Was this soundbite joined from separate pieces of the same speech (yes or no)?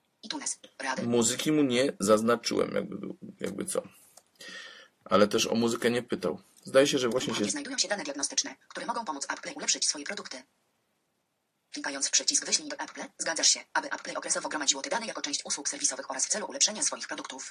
no